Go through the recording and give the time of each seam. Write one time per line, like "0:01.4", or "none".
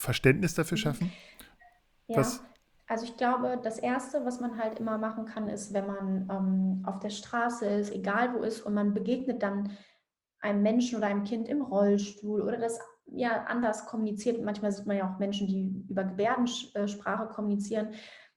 0:07.9

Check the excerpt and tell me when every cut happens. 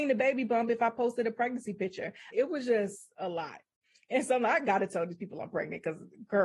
0:02.3

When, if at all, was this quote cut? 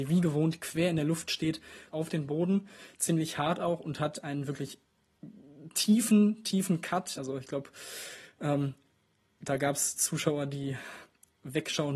0:01.9
0:07.2

